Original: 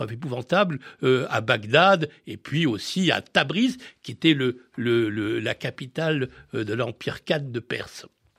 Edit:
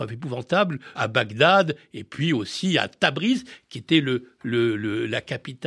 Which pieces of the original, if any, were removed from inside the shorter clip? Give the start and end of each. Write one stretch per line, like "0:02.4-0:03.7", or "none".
0:01.0-0:01.3